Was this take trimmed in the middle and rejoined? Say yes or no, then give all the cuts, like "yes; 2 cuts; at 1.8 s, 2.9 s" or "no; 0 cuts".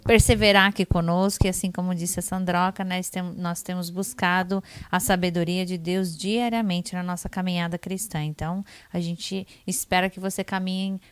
no; 0 cuts